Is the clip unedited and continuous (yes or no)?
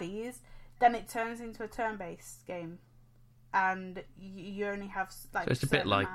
yes